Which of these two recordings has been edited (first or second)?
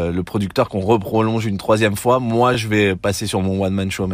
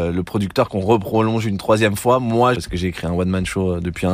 second